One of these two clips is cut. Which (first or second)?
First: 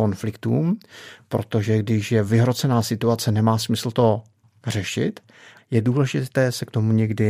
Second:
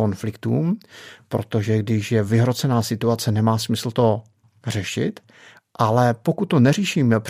first